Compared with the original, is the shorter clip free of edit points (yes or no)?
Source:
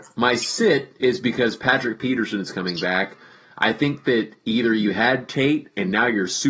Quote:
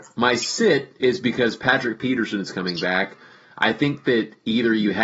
yes